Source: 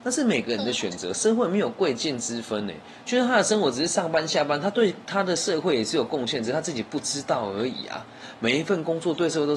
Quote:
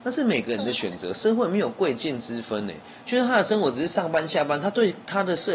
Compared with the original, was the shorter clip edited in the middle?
no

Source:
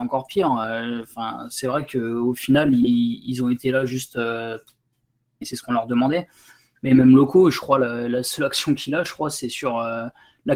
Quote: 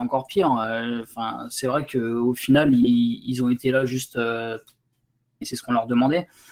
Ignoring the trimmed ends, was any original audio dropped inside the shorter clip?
no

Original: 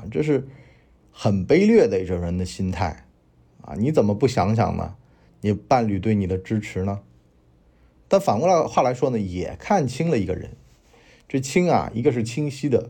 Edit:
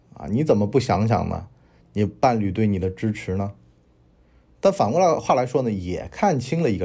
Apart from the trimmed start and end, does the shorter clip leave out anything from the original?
no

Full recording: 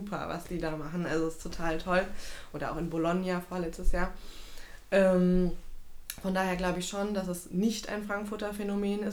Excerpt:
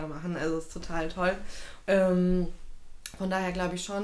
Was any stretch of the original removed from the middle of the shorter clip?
yes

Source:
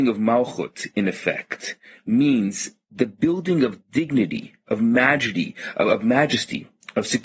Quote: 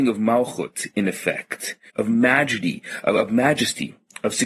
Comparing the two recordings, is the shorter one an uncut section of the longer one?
no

